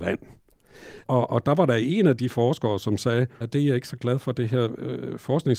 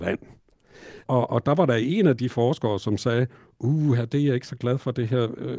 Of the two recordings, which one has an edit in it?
first; 1 cut; at 3.4 s

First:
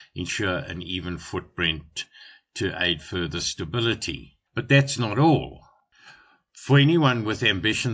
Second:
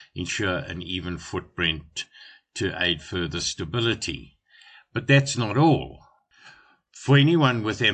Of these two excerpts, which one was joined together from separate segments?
first; 1 cut; at 4.5 s

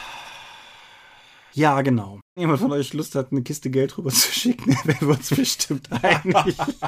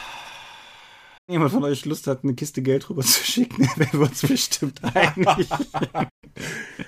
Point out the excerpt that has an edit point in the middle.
second; 1 cut; at 1.2 s

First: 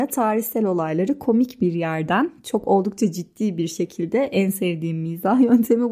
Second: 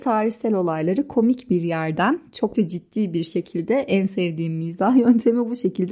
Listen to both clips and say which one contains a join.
second; 1 cut; at 2.5 s

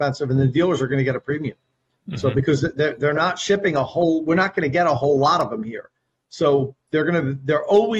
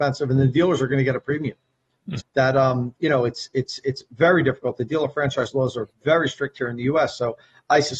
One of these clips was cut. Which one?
second; 1 cut; at 2.2 s

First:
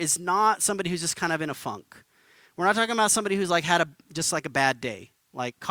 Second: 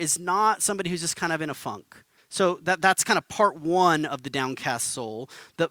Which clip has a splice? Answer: second; 1 cut; at 2.2 s

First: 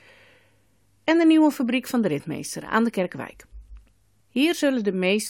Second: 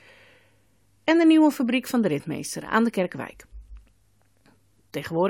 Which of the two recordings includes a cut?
first; 1 cut; at 4.2 s

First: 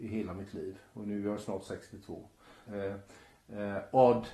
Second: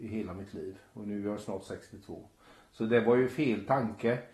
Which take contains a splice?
first; 1 cut; at 2.7 s

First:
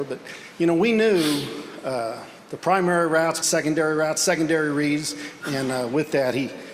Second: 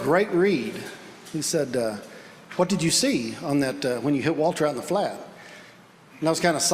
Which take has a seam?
first; 2 cuts; at 3.4 s, 5.4 s

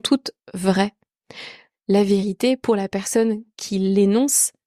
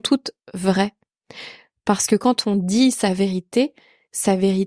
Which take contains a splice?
first; 1 cut; at 1.7 s

